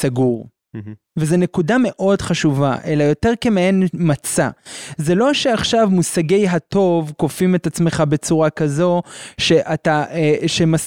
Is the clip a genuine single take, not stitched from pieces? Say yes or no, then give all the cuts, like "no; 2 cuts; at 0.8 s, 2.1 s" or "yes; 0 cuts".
yes; 0 cuts